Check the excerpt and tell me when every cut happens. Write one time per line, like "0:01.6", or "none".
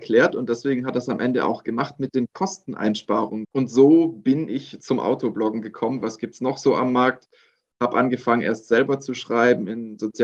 0:03.4
0:06.0